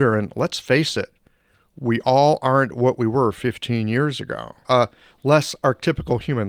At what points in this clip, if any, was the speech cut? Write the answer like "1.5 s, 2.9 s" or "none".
4.6 s